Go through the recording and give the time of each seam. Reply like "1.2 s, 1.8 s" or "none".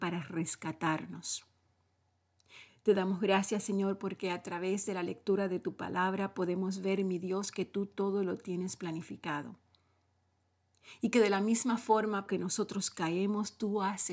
2.7 s, 12.3 s